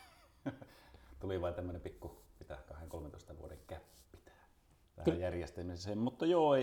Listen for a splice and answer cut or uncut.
cut